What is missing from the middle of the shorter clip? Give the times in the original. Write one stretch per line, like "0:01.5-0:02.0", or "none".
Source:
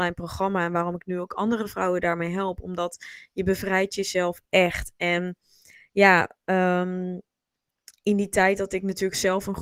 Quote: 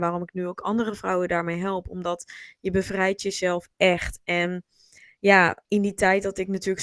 0:06.4-0:08.0